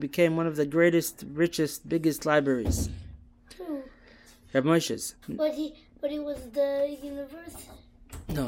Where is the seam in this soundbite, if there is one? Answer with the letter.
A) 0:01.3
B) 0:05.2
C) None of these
B